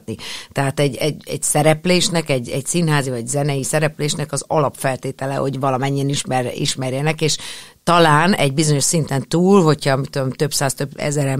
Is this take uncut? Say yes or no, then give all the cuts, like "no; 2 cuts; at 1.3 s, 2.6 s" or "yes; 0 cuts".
yes; 0 cuts